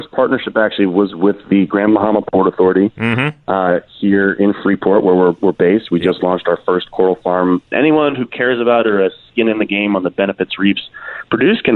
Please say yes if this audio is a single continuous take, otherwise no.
no